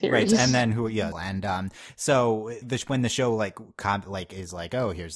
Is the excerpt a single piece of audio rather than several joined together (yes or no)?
no